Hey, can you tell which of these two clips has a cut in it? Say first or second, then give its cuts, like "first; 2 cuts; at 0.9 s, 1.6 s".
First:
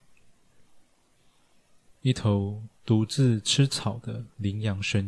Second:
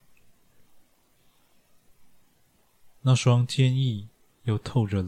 first; 1 cut; at 1.9 s